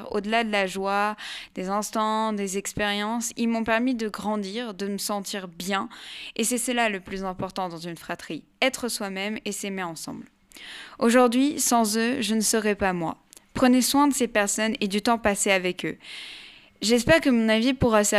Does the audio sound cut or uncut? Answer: uncut